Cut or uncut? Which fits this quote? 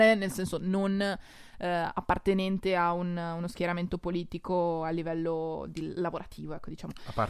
uncut